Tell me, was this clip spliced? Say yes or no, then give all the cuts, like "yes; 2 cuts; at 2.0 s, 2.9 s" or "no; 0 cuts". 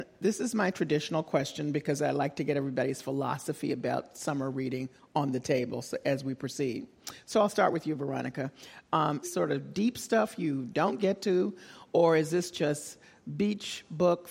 yes; 1 cut; at 9.2 s